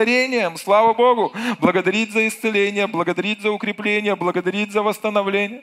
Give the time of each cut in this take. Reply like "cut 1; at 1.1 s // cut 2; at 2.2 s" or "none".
none